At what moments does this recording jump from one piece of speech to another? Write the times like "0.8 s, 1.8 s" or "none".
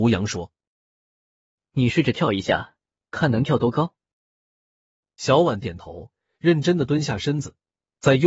5.6 s